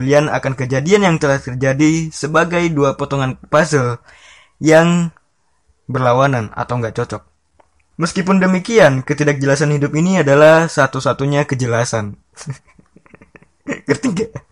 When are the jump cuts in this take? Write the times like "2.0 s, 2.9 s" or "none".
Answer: 7.9 s